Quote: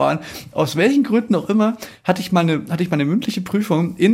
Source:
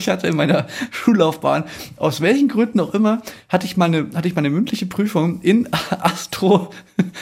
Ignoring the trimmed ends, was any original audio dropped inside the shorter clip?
no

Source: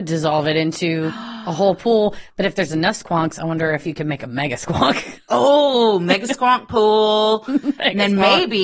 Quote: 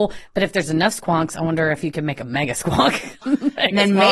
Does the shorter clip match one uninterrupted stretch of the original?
no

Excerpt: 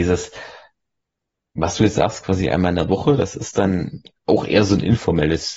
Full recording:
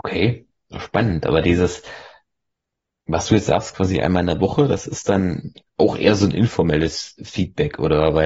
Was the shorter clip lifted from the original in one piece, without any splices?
yes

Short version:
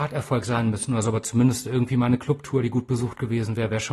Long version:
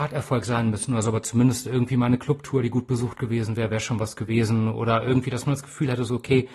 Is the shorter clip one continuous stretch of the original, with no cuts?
yes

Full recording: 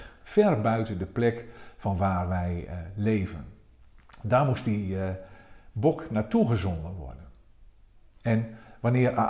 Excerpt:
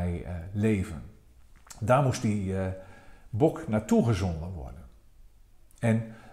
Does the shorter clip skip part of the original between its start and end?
no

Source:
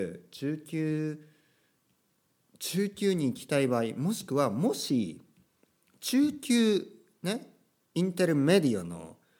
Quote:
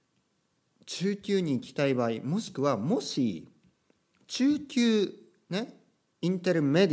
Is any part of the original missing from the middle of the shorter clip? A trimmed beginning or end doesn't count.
no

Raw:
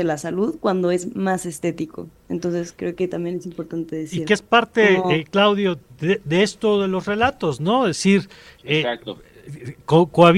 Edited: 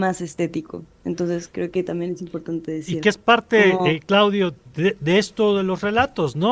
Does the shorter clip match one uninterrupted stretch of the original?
yes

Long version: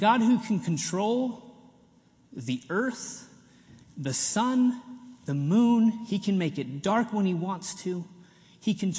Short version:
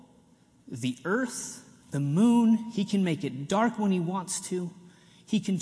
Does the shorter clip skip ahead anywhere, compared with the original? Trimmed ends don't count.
yes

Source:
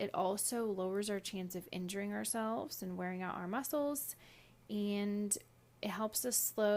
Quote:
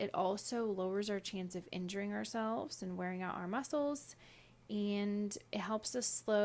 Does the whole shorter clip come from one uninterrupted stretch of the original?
no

